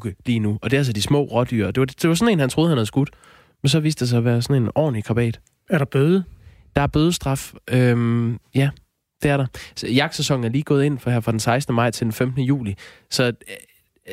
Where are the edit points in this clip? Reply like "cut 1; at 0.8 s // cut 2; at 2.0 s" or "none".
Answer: none